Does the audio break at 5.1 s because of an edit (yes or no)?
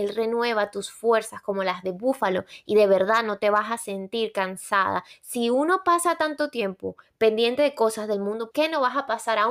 yes